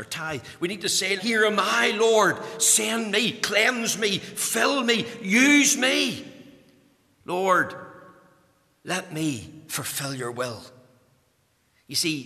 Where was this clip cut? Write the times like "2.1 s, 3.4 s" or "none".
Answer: 1.2 s

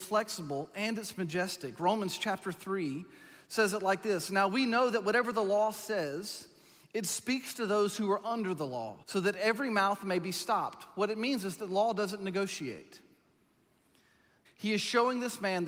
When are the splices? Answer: 9.0 s, 14.4 s

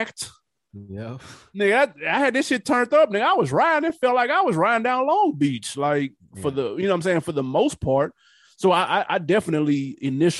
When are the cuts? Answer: none

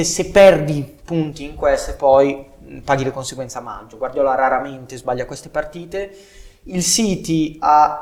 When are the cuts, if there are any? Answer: none

